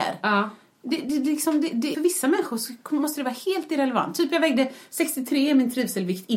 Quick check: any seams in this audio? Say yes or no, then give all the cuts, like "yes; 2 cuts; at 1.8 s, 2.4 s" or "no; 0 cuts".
yes; 1 cut; at 1.9 s